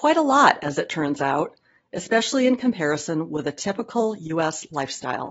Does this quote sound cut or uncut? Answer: uncut